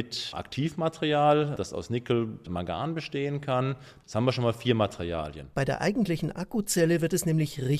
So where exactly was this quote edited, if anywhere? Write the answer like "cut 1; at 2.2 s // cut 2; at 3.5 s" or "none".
cut 1; at 2.4 s // cut 2; at 4.0 s // cut 3; at 5.5 s